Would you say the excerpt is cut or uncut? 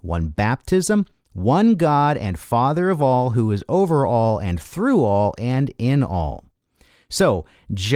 uncut